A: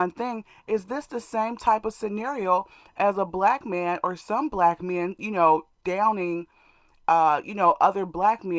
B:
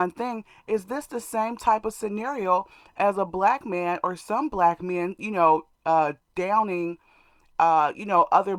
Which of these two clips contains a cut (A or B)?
A